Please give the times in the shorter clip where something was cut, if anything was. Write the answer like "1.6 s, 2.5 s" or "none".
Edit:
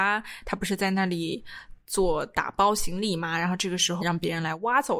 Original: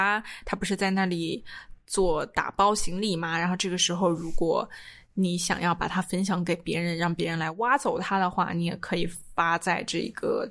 4.0 s